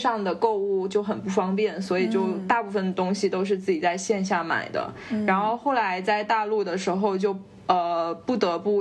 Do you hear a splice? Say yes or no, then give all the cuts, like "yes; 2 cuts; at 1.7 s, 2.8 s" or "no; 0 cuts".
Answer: no; 0 cuts